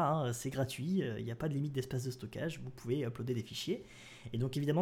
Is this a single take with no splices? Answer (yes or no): yes